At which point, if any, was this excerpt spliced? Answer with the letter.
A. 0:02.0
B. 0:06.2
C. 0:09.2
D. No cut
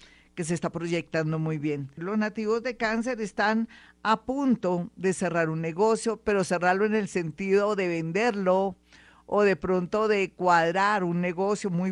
A